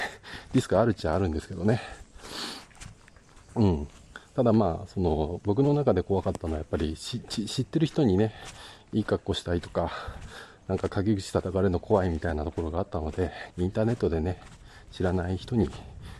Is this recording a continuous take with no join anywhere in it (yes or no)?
no